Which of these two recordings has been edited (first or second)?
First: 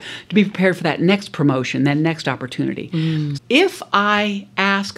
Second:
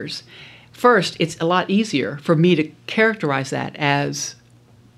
first